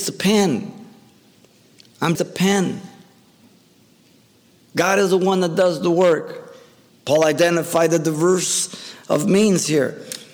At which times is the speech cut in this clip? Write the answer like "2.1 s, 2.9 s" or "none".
2.2 s, 6.9 s